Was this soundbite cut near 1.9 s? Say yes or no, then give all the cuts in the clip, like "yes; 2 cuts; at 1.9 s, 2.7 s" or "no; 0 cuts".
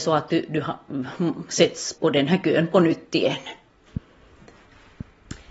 yes; 1 cut; at 1.9 s